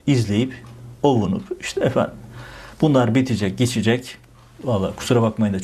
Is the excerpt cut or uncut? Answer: cut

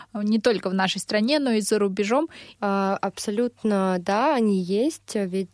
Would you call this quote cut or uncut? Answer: cut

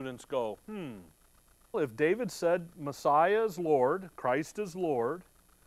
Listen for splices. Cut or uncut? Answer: cut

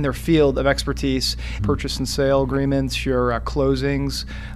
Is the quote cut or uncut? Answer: cut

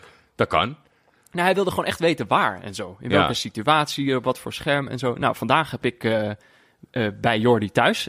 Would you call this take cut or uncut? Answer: uncut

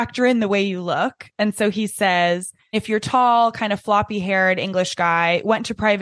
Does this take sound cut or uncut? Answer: uncut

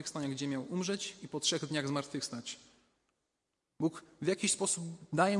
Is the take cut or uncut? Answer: cut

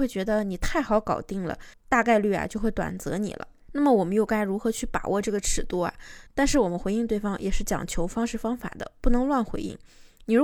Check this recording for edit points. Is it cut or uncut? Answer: cut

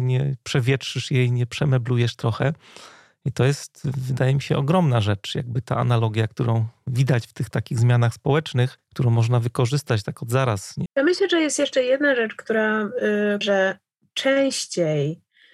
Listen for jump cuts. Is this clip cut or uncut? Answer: cut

